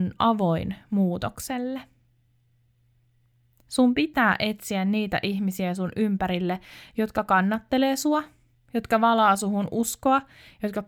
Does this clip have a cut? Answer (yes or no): no